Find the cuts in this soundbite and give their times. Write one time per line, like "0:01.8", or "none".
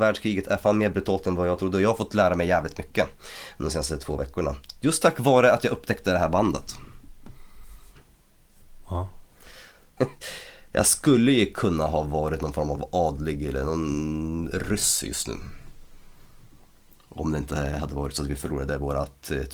0:08.0
0:10.0